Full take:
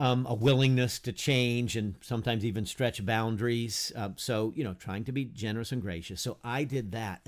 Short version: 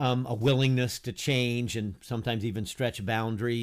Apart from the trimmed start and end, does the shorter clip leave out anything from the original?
no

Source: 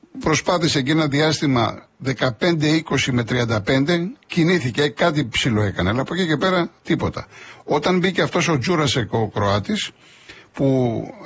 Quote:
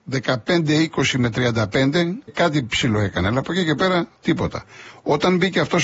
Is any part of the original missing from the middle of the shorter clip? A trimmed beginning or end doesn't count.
yes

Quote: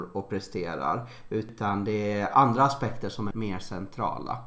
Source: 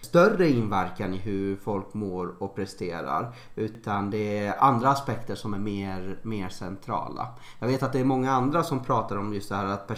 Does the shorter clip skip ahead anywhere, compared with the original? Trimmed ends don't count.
yes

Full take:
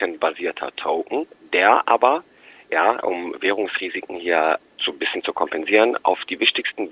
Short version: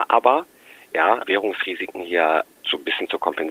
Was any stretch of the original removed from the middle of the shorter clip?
yes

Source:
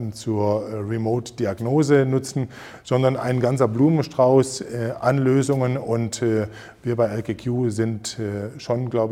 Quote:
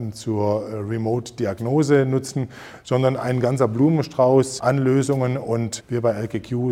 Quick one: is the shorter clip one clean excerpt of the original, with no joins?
no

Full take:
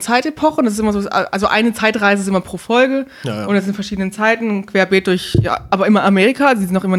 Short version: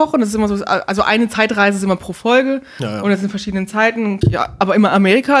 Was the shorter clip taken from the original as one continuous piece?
no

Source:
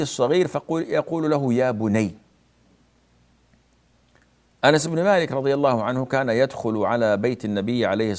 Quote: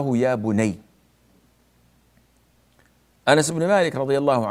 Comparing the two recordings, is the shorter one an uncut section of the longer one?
yes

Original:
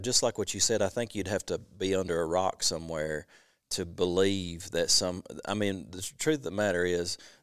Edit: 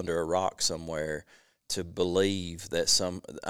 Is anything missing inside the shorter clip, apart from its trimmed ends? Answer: no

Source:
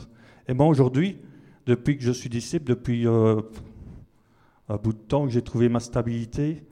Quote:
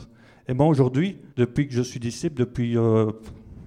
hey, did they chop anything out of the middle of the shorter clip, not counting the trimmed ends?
yes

